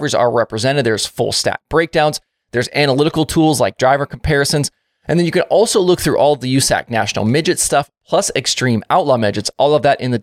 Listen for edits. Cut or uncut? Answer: uncut